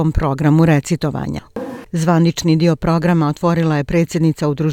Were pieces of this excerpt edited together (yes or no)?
yes